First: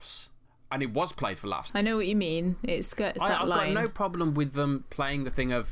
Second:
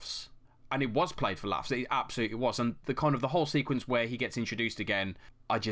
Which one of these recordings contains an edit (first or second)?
first